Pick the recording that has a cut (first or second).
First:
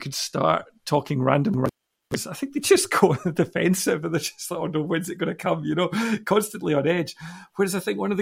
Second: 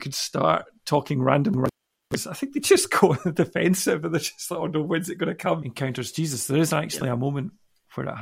second